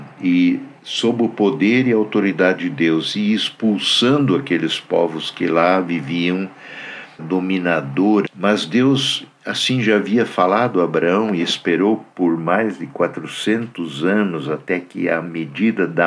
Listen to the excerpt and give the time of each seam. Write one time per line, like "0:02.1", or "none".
0:07.2
0:08.2

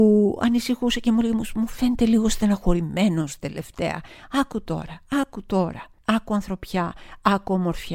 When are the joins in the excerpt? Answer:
none

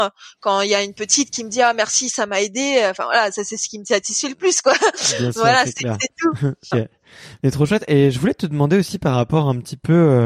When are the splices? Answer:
0:06.7

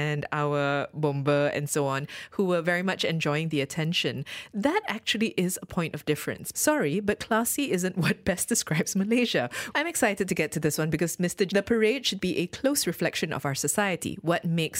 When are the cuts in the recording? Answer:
0:06.5
0:09.7
0:11.5

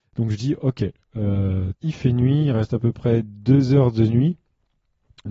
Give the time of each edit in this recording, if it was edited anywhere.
0:01.8

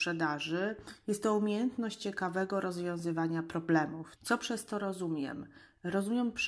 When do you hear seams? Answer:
0:04.2

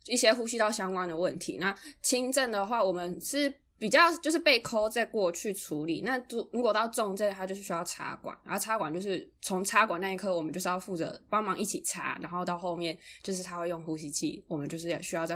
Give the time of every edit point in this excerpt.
none

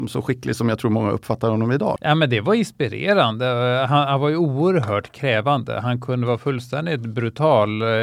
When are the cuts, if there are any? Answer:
0:02.0

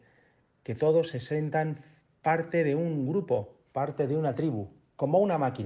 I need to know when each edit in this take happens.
none

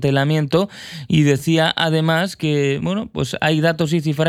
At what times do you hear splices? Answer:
none

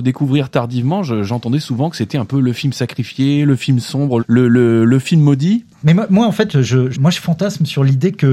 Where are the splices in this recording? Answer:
0:04.2
0:05.8
0:06.9

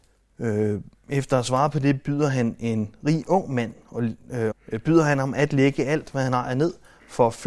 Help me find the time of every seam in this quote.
0:04.5

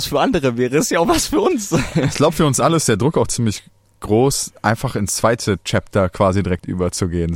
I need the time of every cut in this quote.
none

